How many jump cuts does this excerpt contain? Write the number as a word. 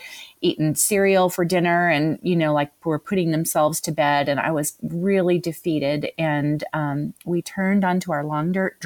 zero